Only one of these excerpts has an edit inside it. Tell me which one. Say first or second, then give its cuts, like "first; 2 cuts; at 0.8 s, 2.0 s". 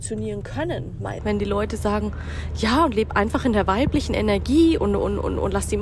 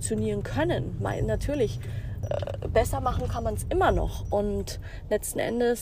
first; 2 cuts; at 1.2 s, 4.8 s